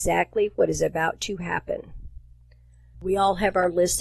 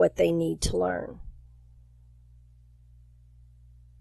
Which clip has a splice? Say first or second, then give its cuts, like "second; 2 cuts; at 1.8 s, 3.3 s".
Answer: first; 1 cut; at 2.9 s